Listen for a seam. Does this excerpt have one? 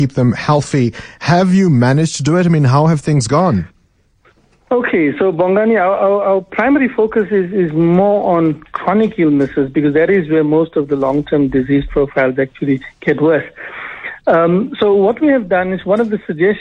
no; 0 cuts

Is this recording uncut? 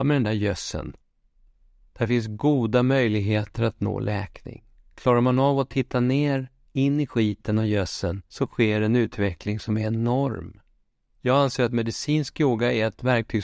no; 2 cuts; at 8.3 s, 11.1 s

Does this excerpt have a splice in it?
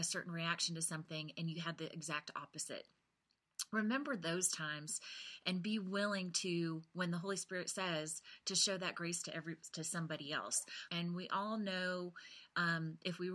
yes; 1 cut; at 10.9 s

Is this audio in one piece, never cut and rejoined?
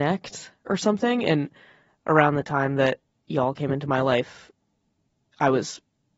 yes; 0 cuts

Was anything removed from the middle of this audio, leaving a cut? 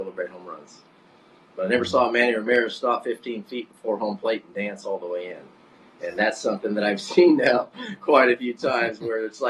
no; 0 cuts

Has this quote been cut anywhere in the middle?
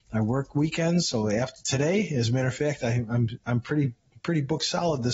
no; 0 cuts

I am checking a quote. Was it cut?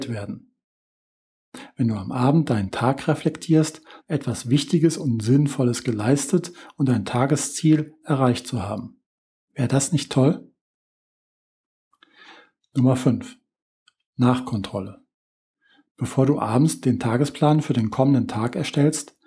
yes; 1 cut; at 4.0 s

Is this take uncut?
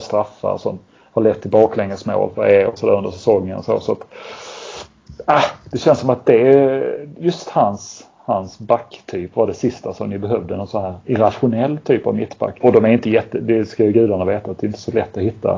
no; 1 cut; at 12.6 s

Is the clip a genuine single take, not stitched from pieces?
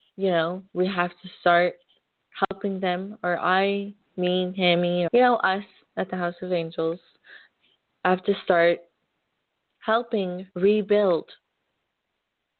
no; 3 cuts; at 5.1 s, 7.9 s, 10.5 s

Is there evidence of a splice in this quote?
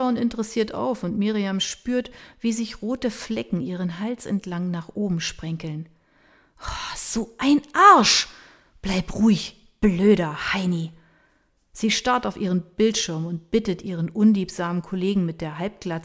no; 0 cuts

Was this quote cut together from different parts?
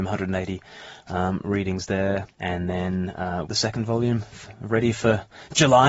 yes; 2 cuts; at 2.3 s, 3.5 s

